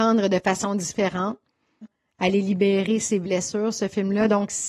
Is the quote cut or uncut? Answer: cut